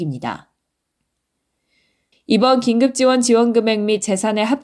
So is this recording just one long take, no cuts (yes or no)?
no